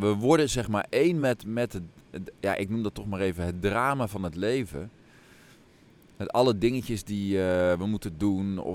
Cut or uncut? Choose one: uncut